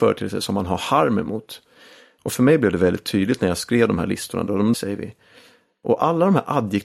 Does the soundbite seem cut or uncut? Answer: cut